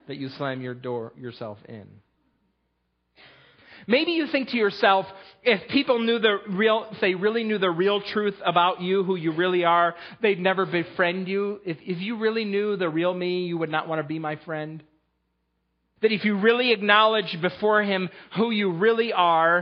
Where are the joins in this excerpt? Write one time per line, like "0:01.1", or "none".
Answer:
0:06.9
0:16.0